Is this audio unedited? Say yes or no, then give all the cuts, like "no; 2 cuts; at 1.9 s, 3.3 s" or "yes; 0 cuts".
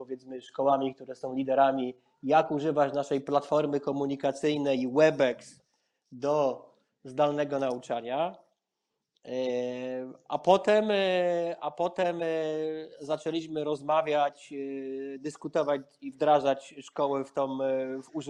yes; 0 cuts